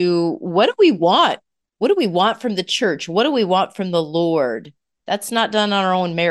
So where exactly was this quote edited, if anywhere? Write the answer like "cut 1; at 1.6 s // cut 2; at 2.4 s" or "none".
cut 1; at 5.0 s